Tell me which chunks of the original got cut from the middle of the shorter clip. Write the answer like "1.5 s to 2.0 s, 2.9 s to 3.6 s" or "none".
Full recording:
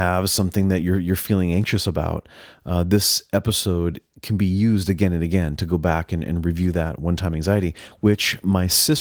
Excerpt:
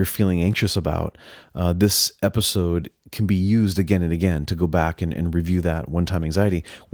none